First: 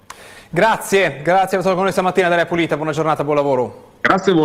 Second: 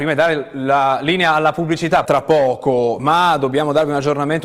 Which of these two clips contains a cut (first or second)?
second